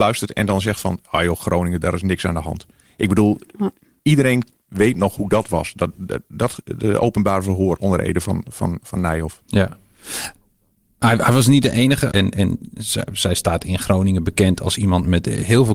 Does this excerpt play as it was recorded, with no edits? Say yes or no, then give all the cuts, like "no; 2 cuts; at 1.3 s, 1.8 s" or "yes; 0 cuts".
no; 2 cuts; at 9.4 s, 12.1 s